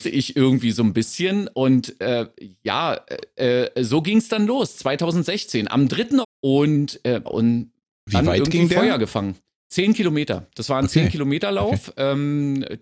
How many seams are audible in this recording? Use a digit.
2